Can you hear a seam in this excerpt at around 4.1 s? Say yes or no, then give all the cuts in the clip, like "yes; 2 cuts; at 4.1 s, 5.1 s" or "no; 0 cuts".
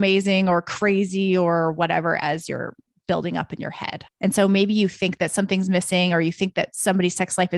yes; 1 cut; at 4.1 s